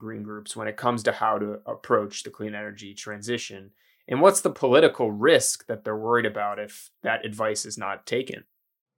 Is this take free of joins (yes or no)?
yes